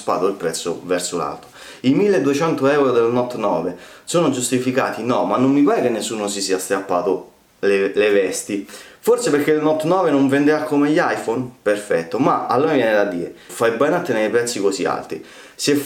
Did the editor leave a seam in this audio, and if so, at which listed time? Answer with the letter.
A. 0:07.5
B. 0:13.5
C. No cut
B